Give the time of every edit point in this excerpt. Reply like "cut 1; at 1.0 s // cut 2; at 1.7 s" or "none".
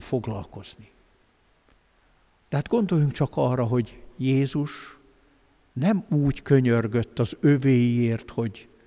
cut 1; at 2.4 s